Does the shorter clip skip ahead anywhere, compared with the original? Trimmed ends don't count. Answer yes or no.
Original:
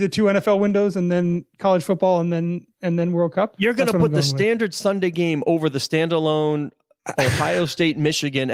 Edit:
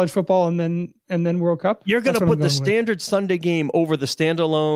no